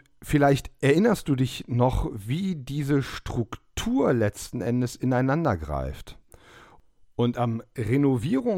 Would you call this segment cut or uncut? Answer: uncut